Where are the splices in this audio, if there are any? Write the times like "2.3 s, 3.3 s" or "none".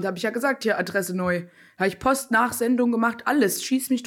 none